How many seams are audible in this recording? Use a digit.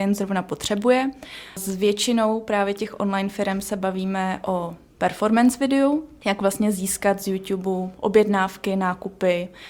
0